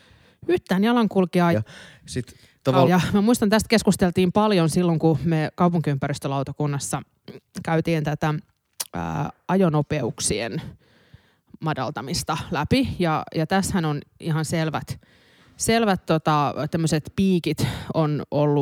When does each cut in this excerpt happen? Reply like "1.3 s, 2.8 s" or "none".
1.5 s, 2.9 s